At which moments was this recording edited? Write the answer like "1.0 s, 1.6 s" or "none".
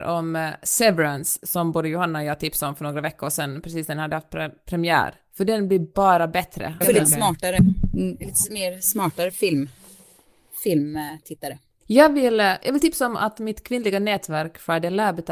6.8 s